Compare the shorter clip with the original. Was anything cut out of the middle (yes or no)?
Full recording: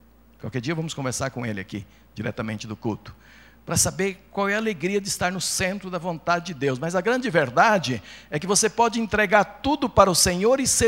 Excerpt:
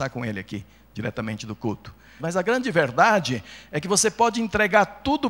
yes